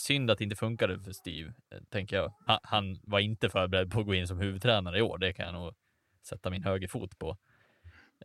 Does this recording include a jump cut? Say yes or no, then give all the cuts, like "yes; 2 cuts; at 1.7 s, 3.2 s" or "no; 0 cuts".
yes; 1 cut; at 2.5 s